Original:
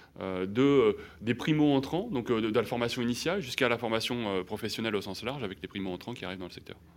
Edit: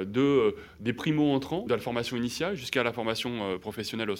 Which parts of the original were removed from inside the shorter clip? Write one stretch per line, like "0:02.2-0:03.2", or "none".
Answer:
0:02.1-0:02.5